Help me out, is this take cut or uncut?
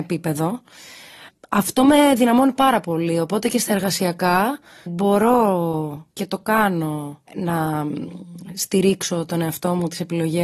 cut